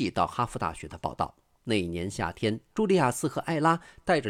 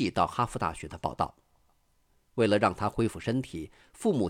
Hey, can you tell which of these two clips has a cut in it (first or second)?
first